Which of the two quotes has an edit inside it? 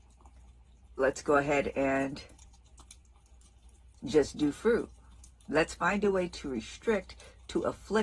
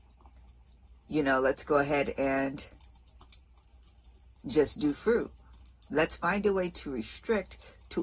first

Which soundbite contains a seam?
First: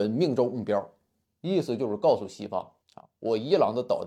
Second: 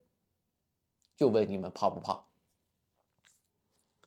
first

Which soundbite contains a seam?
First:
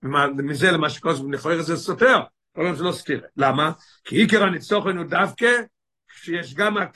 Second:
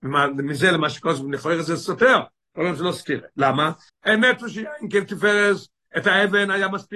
second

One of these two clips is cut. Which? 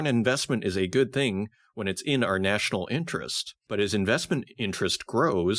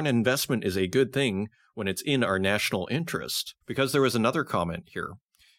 second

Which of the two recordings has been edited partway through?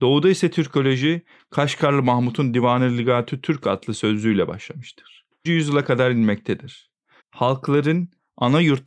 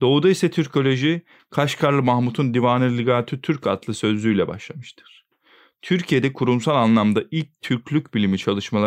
first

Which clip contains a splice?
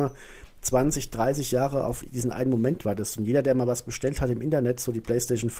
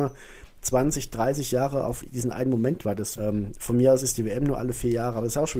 second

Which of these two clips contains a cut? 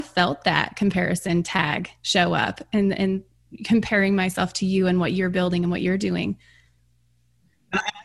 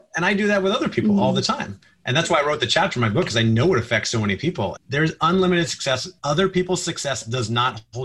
second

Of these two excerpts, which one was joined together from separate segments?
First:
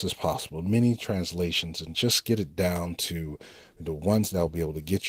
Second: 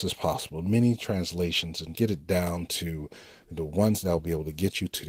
second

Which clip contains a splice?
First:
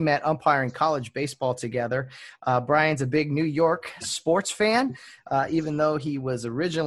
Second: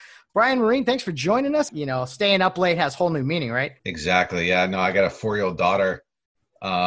second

